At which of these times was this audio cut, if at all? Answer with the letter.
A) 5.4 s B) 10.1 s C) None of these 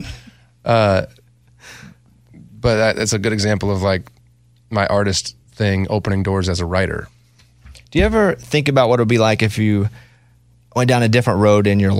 A